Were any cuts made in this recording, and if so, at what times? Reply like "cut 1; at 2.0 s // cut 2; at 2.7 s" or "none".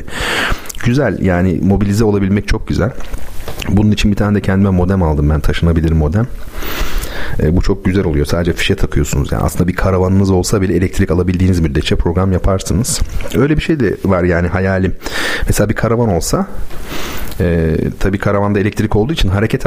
none

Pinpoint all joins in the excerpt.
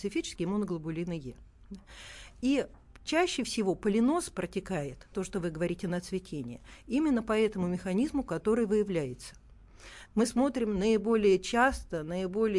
cut 1; at 5.1 s // cut 2; at 10.1 s

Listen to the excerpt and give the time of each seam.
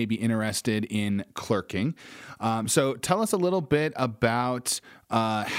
none

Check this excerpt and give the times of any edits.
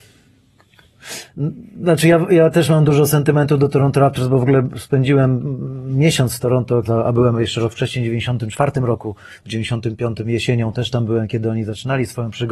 cut 1; at 6.8 s

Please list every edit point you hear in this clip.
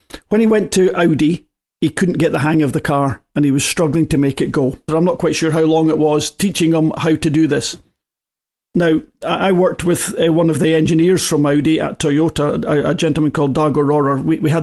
cut 1; at 4.9 s

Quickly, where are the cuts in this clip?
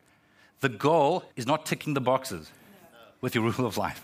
cut 1; at 1.3 s

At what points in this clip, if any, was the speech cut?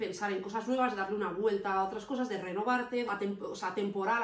cut 1; at 3.1 s

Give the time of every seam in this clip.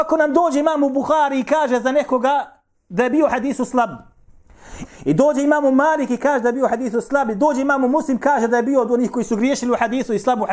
cut 1; at 4.8 s

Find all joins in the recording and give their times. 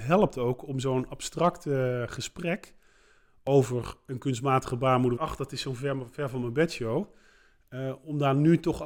cut 1; at 5.2 s

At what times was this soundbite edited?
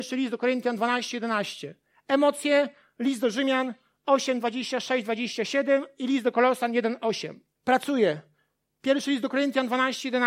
cut 1; at 7.6 s

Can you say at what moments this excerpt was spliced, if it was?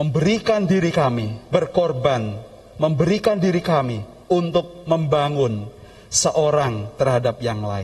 none

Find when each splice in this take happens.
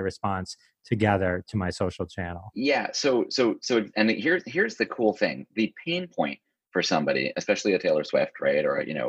none

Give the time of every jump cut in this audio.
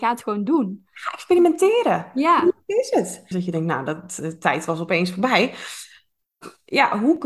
cut 1; at 3.3 s

